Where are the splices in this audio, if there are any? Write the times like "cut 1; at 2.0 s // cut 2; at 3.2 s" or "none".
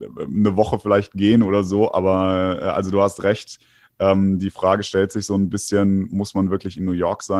none